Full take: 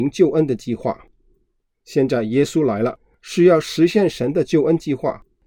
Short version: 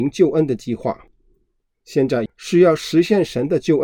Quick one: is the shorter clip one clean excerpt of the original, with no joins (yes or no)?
no